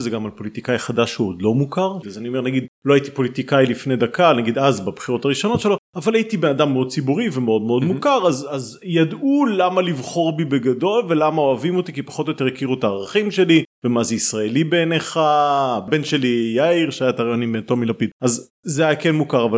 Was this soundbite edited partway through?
yes; 1 cut; at 2.0 s

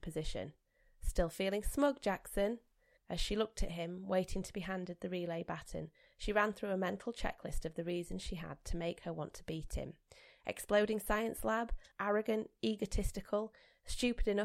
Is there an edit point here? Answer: yes; 2 cuts; at 3.0 s, 11.9 s

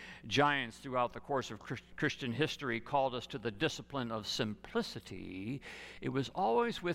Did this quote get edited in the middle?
no; 0 cuts

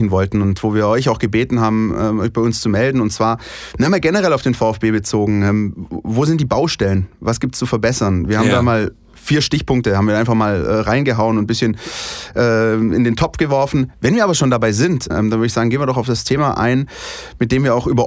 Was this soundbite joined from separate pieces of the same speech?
yes; 2 cuts; at 13.9 s, 15.1 s

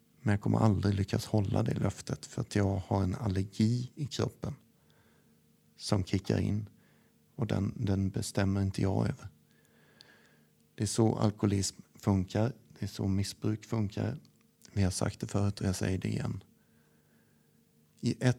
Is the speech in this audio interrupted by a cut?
no; 0 cuts

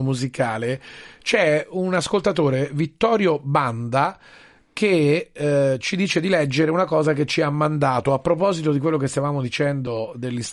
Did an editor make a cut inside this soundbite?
no; 0 cuts

